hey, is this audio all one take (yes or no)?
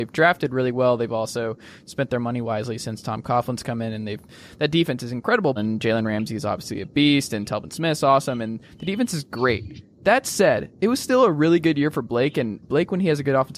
no